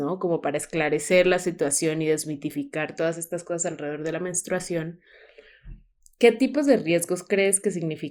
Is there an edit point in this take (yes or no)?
no